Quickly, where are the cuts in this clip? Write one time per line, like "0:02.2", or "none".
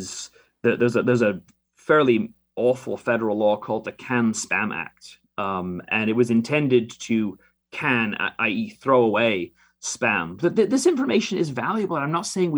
0:10.4